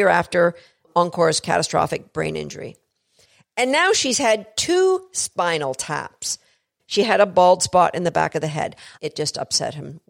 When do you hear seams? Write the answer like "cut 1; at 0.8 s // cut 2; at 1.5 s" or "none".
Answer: cut 1; at 6.8 s // cut 2; at 9.0 s